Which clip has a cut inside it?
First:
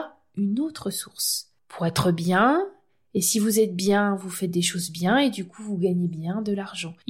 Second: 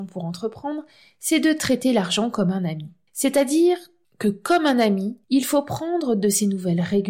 second; 1 cut; at 5.2 s

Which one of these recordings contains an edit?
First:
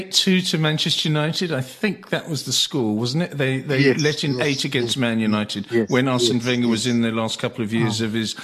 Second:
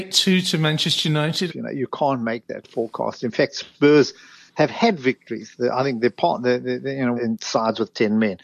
second; 2 cuts; at 1.5 s, 7.2 s

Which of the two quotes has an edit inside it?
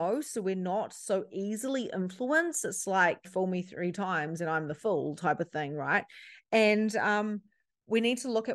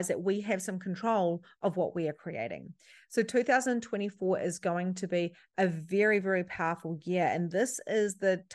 first; 1 cut; at 3.2 s

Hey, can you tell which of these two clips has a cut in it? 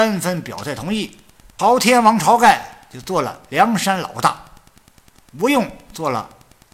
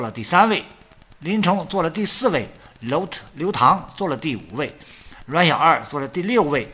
first; 1 cut; at 1.6 s

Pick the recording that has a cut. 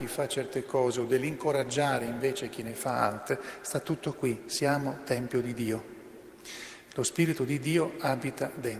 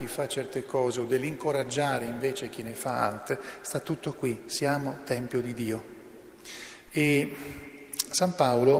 second; 1 cut; at 6.9 s

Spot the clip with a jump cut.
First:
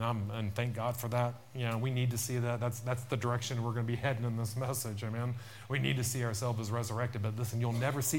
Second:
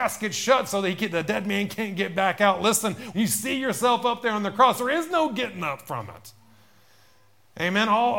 second; 1 cut; at 3.1 s

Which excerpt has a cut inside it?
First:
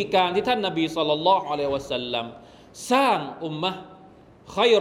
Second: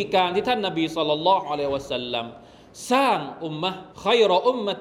second; 1 cut; at 3.9 s

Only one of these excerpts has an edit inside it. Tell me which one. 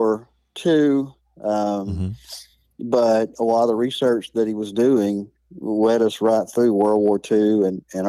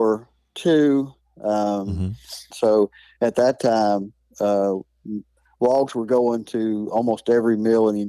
second; 1 cut; at 2.5 s

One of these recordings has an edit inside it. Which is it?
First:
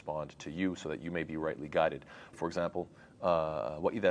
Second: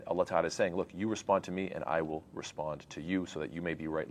first; 1 cut; at 2.3 s

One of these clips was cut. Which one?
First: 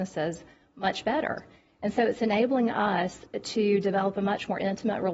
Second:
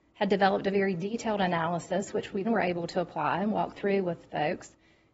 second; 1 cut; at 2.4 s

